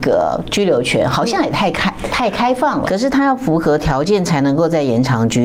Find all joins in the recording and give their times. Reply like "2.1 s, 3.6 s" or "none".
2.8 s